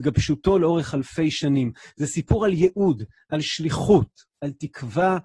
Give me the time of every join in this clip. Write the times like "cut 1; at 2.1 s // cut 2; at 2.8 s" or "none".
none